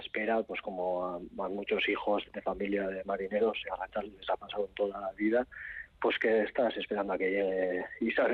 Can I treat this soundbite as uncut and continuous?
no; 1 cut; at 2.2 s

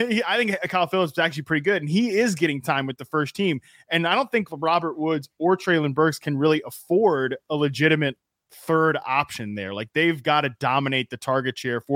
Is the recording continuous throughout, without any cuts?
yes; 0 cuts

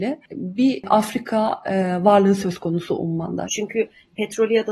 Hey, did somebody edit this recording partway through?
yes; 1 cut; at 3.5 s

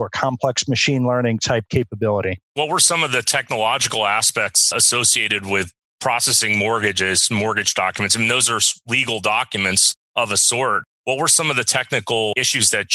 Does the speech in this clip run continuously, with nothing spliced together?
yes; 0 cuts

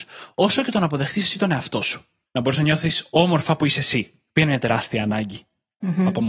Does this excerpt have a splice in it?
yes; 1 cut; at 2.3 s

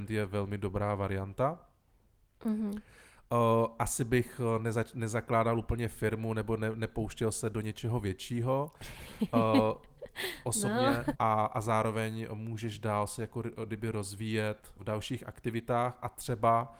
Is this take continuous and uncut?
no; 2 cuts; at 11.1 s, 14.8 s

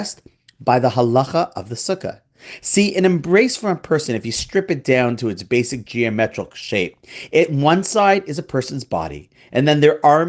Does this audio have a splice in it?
no; 0 cuts

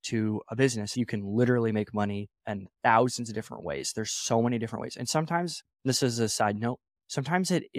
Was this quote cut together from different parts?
yes; 2 cuts; at 0.9 s, 2.4 s

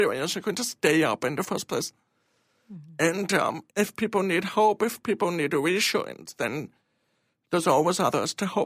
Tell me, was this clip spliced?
no; 0 cuts

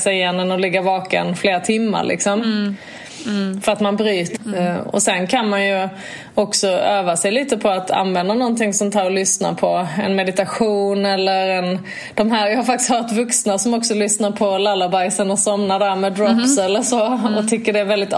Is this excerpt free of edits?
no; 1 cut; at 4.3 s

